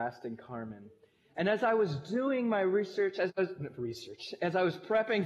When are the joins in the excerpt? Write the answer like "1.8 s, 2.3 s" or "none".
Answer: none